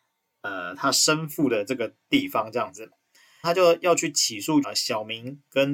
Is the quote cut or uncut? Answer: cut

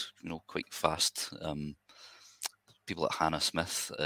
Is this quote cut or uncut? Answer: uncut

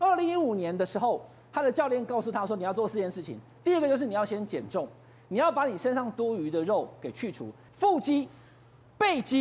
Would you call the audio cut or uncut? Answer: cut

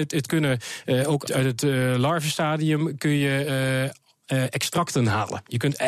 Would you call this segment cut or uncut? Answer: cut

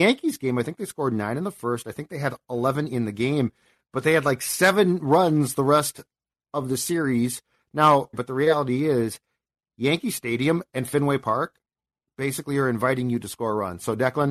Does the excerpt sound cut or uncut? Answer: cut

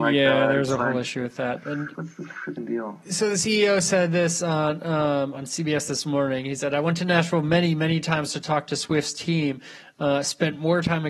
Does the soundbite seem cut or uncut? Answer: cut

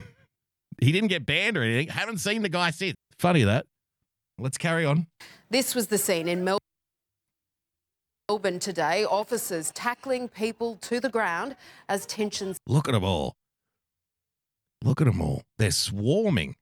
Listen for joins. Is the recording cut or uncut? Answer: cut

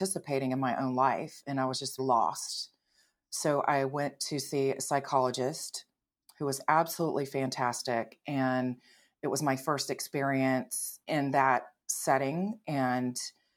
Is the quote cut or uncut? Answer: cut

